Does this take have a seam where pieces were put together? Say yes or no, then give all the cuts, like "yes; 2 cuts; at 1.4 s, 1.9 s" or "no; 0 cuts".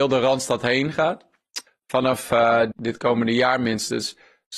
yes; 2 cuts; at 1.7 s, 2.7 s